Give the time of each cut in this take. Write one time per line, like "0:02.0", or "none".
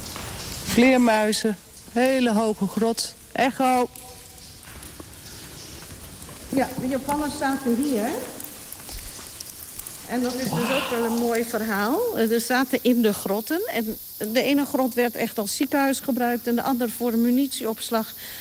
none